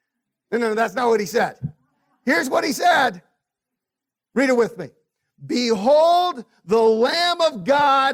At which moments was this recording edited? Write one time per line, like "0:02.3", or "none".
none